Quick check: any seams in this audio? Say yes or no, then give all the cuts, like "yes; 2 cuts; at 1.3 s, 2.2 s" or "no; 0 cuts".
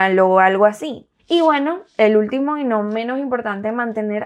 yes; 1 cut; at 1.2 s